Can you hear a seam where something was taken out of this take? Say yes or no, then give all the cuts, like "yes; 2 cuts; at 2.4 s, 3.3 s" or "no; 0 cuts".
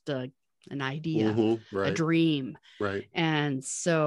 no; 0 cuts